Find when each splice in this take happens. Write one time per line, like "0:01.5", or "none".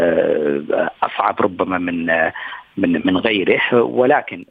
none